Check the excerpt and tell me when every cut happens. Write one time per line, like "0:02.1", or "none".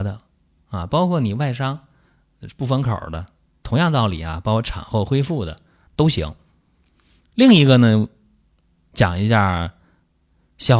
none